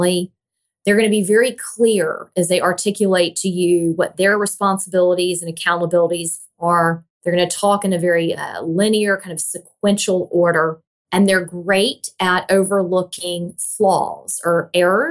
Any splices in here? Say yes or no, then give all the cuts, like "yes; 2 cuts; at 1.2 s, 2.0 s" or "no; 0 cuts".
no; 0 cuts